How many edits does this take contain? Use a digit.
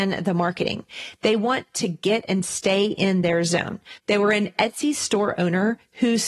1